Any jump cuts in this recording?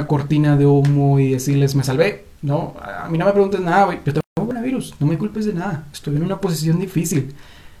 no; 0 cuts

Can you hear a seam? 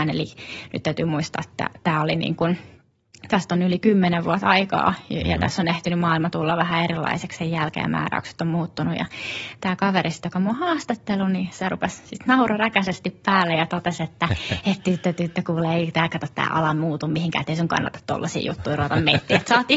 no; 0 cuts

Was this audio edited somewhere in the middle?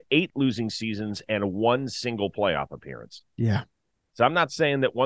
no; 0 cuts

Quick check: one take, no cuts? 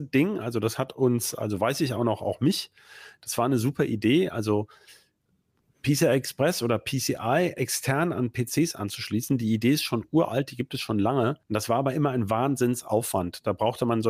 no; 1 cut; at 11.4 s

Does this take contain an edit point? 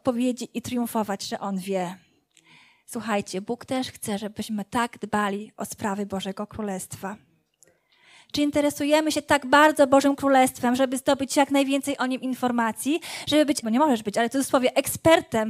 yes; 2 cuts; at 10.8 s, 13.6 s

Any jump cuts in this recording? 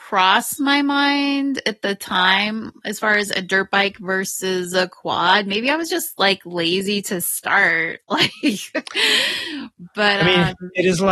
no; 0 cuts

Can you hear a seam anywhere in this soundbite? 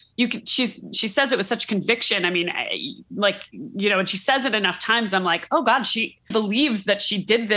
yes; 1 cut; at 6.3 s

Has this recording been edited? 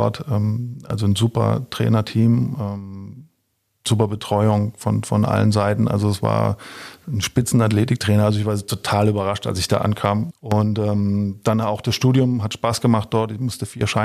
yes; 1 cut; at 10.3 s

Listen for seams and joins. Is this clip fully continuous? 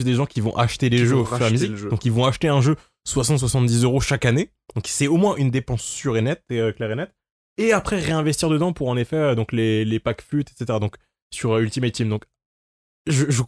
yes; 0 cuts

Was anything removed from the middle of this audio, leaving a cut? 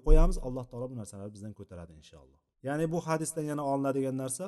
yes; 1 cut; at 2.5 s

